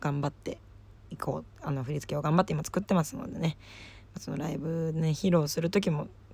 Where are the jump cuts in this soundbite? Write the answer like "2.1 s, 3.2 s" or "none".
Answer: 1.0 s